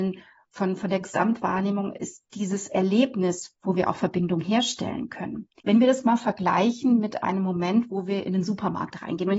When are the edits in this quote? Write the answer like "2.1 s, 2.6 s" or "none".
5.6 s